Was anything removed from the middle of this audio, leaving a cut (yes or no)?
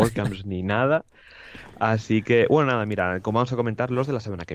no